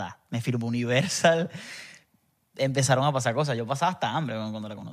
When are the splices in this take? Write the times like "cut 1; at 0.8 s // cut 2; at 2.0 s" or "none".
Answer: none